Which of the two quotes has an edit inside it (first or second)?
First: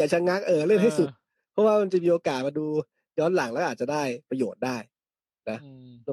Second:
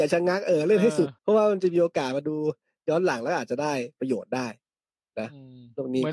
second